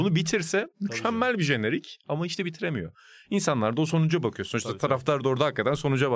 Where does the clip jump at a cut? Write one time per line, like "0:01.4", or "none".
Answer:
none